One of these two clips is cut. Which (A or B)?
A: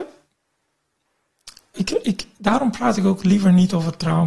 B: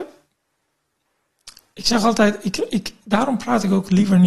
A